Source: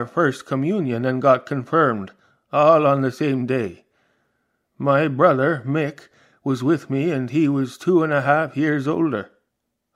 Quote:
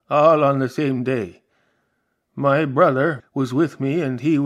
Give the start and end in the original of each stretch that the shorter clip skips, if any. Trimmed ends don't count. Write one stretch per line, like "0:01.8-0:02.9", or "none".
0:05.6-0:06.3